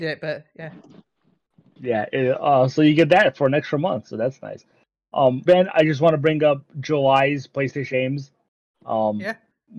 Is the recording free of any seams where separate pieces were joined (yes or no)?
no